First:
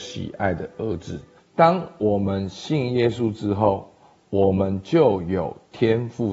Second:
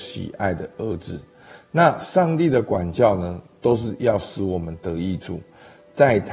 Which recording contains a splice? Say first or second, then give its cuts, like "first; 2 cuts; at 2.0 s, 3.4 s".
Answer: first; 1 cut; at 1.4 s